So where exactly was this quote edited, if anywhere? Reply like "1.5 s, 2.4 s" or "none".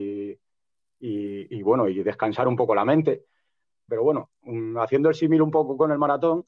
3.9 s